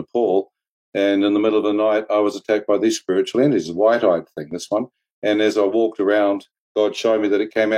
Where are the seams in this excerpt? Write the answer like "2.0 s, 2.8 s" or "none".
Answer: none